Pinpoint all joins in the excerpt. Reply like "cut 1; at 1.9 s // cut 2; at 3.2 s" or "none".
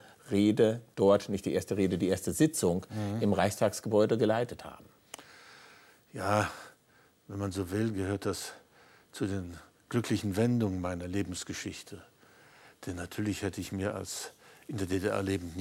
none